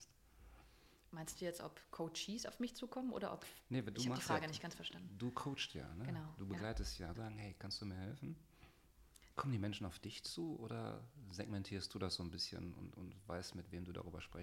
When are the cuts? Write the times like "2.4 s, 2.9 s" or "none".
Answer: 7.1 s, 9.3 s